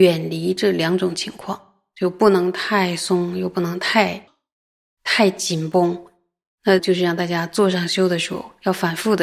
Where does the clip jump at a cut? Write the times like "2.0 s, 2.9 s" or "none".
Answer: 6.8 s